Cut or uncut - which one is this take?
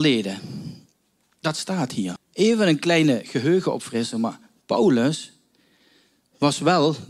cut